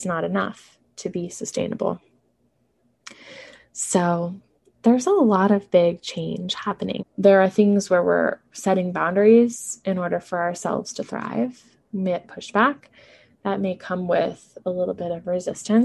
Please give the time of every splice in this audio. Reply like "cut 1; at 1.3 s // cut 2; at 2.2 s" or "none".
cut 1; at 7.0 s // cut 2; at 12.3 s